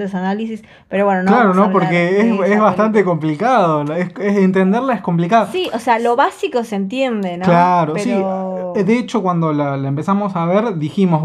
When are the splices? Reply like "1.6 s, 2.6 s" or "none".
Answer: none